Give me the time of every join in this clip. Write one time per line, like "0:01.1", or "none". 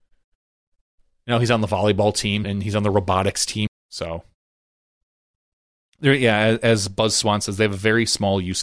0:02.4
0:03.7